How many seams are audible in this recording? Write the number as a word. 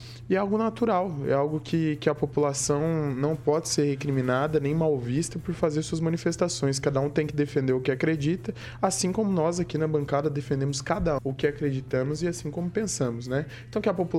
one